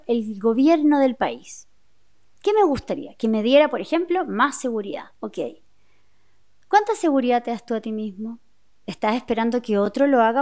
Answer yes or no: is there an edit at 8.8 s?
no